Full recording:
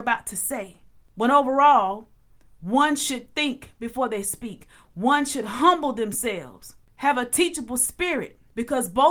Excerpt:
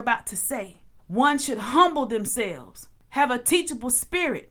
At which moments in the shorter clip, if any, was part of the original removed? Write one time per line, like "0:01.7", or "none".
0:01.0